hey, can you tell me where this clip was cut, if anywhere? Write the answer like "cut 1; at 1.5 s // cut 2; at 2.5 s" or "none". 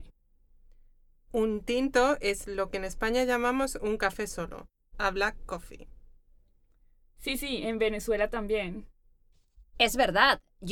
cut 1; at 2.4 s